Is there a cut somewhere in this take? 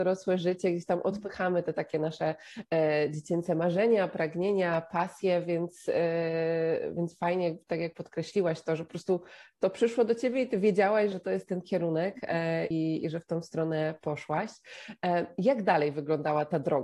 yes; 2 cuts; at 11.1 s, 12.7 s

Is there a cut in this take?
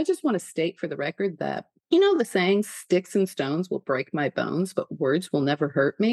no; 0 cuts

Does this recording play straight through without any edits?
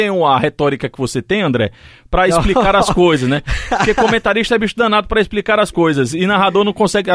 yes; 0 cuts

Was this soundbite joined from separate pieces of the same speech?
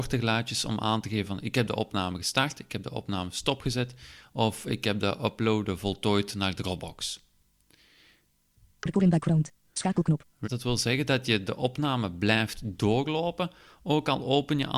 yes; 1 cut; at 10.4 s

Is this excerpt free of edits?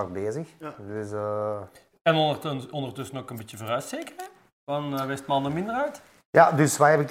yes; 0 cuts

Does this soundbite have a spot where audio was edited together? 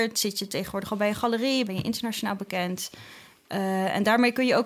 yes; 1 cut; at 1.7 s

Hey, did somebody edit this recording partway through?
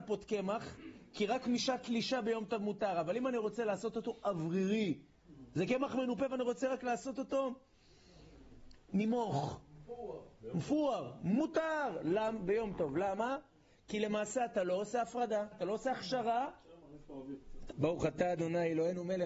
yes; 2 cuts; at 15.5 s, 17.7 s

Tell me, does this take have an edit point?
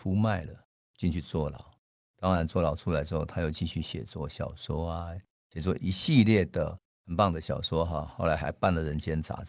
no; 0 cuts

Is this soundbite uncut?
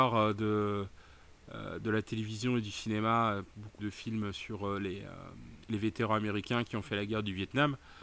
no; 2 cuts; at 3.8 s, 5.6 s

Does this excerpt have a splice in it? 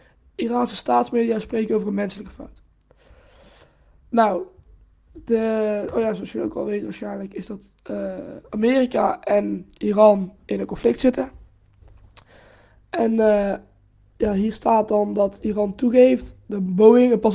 no; 0 cuts

